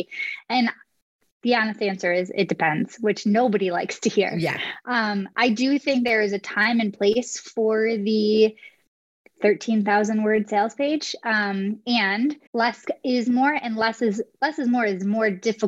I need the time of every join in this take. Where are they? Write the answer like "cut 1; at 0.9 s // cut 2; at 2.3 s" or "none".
cut 1; at 12.5 s

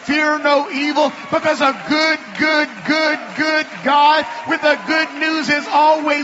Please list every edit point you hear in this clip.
none

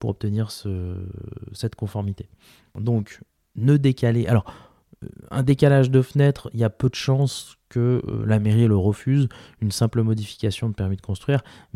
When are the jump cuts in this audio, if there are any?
none

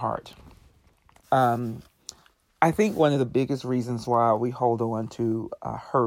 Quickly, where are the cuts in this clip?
cut 1; at 1.2 s

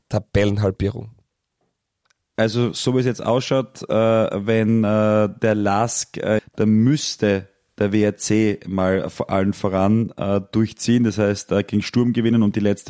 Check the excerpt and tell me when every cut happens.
cut 1; at 6.4 s

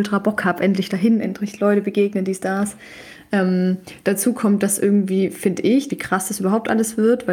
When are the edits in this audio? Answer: cut 1; at 5.9 s

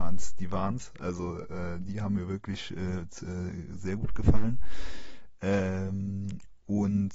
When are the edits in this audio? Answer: none

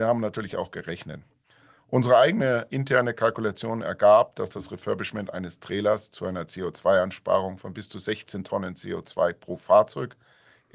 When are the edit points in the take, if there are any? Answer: cut 1; at 2.7 s

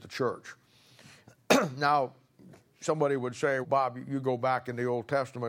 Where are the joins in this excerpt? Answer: cut 1; at 1.2 s // cut 2; at 3.6 s

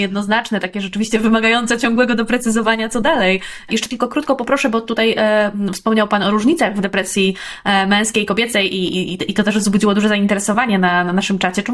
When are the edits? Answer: cut 1; at 3.7 s

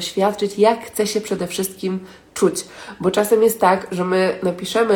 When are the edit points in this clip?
none

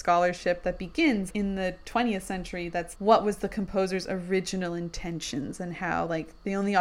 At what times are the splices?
cut 1; at 1.3 s // cut 2; at 2.9 s

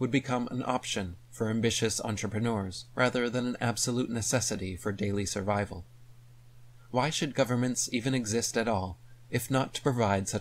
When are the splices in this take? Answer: cut 1; at 2.9 s

